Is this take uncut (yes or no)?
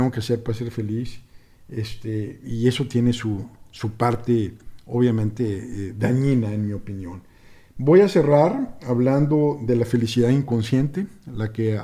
yes